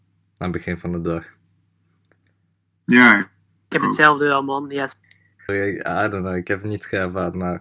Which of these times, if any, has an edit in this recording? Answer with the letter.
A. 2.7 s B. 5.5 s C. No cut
B